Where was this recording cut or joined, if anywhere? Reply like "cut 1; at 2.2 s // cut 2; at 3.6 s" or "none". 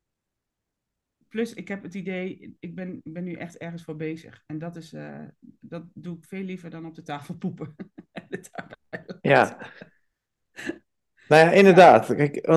none